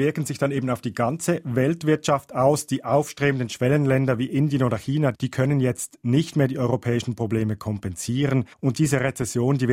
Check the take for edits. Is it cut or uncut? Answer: cut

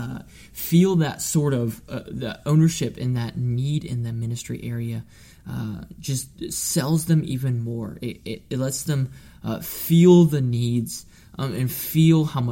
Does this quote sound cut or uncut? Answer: uncut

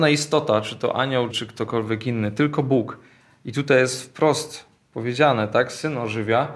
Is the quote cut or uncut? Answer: cut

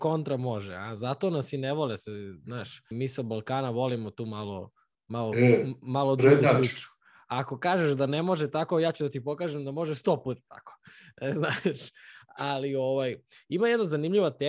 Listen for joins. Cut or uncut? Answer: cut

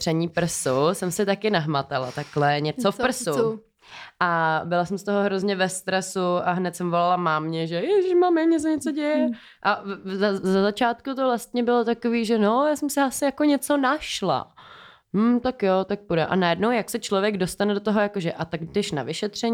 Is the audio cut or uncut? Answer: uncut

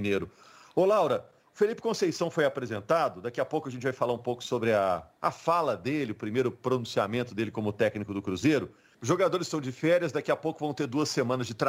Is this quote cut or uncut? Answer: cut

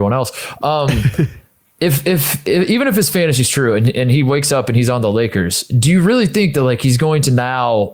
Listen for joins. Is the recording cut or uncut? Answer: uncut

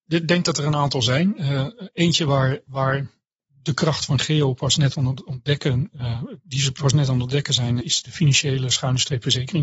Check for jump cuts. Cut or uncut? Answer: cut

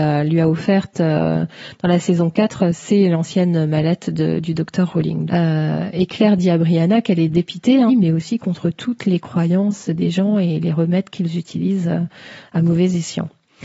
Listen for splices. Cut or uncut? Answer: cut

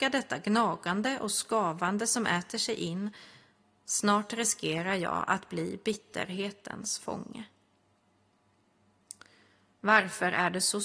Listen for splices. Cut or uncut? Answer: uncut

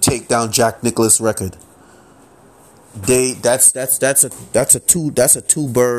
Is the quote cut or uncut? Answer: uncut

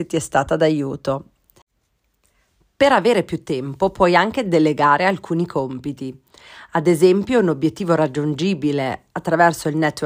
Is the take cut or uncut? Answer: uncut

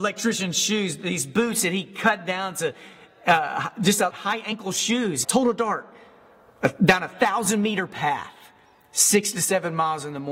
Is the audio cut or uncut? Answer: cut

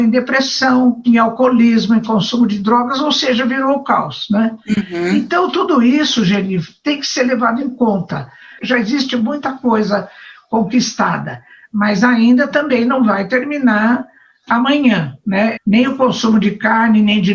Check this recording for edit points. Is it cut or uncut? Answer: cut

